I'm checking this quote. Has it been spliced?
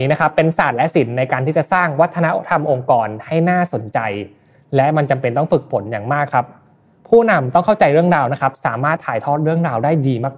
yes; 1 cut; at 9.0 s

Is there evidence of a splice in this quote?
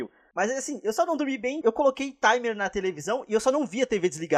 yes; 1 cut; at 1.6 s

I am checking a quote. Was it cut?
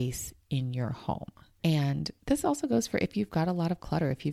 no; 0 cuts

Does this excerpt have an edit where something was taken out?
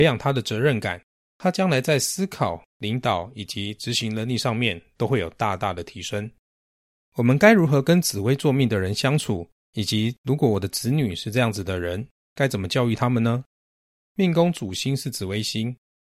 no; 0 cuts

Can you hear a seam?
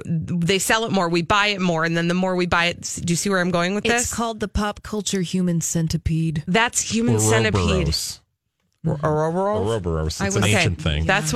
no; 0 cuts

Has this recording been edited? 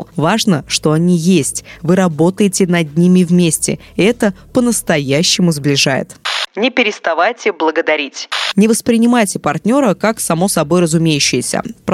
no; 0 cuts

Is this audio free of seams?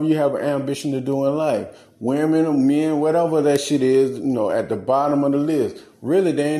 yes; 0 cuts

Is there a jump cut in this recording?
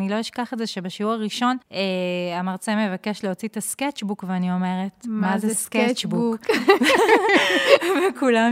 yes; 1 cut; at 1.6 s

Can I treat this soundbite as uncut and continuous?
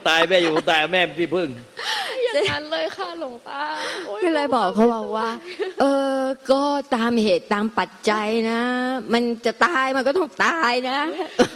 yes; 0 cuts

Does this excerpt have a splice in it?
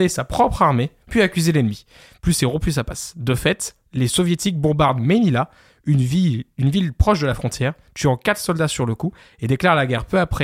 no; 0 cuts

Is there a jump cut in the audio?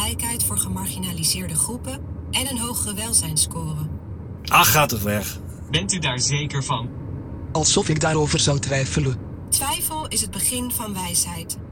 yes; 1 cut; at 5.7 s

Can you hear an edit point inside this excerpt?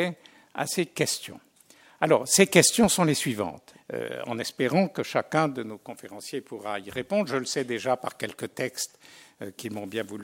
yes; 1 cut; at 3.7 s

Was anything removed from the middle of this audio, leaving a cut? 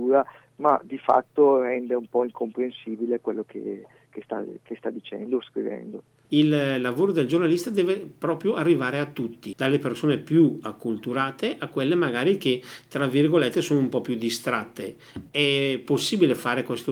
yes; 2 cuts; at 6.2 s, 9.5 s

